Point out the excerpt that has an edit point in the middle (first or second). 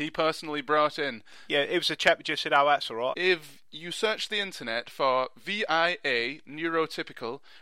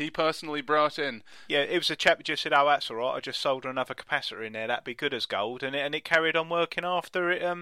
first